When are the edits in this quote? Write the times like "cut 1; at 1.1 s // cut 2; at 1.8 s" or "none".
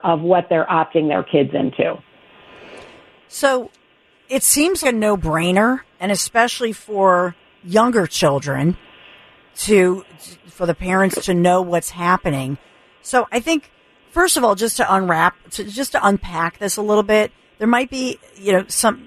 cut 1; at 4.8 s